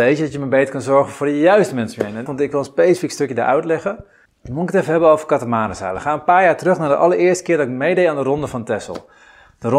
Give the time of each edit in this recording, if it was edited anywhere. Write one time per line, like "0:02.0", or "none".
0:02.3
0:04.3